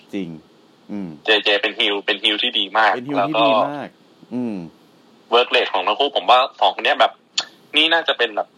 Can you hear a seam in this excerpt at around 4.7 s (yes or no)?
no